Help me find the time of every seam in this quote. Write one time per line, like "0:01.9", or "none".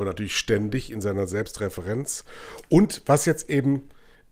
none